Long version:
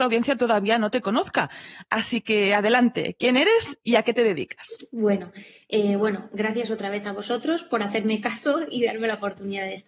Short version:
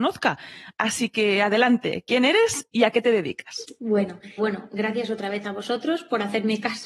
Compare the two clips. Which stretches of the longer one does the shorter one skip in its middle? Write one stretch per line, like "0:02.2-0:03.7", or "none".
0:05.5-0:06.0